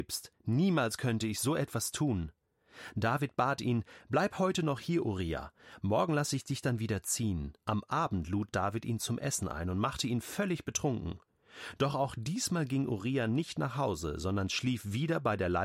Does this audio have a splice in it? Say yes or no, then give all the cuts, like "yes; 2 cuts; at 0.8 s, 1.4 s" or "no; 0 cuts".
yes; 1 cut; at 7.6 s